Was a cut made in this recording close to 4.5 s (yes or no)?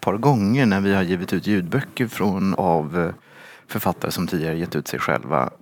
no